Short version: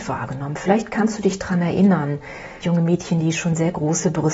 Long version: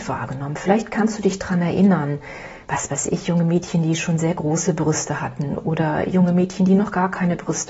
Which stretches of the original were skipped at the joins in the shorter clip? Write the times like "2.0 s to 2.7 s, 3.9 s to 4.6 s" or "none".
2.6 s to 3.2 s

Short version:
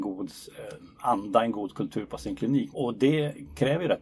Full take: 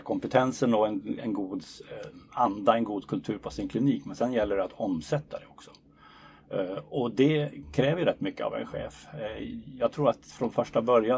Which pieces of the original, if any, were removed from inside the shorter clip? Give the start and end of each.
4.0 s to 6.9 s

